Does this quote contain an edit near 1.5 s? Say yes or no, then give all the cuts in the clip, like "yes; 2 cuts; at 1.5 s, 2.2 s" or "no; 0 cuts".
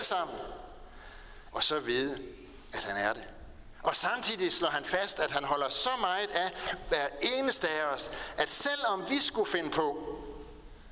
yes; 1 cut; at 1.5 s